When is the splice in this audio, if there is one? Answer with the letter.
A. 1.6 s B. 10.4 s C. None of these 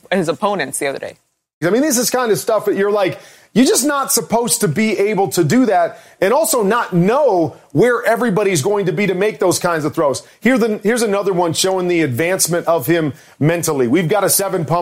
A